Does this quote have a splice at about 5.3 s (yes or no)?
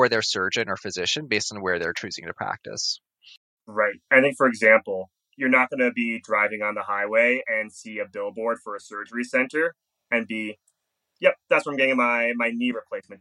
yes